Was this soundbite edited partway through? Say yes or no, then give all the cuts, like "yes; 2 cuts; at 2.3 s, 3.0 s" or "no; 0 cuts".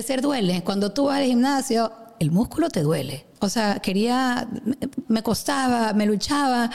yes; 2 cuts; at 3.3 s, 5.0 s